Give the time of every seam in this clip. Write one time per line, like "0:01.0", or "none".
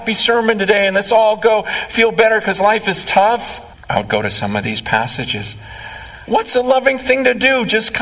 0:03.8
0:06.3